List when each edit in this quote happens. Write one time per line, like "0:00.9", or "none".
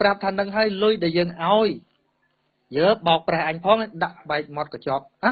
none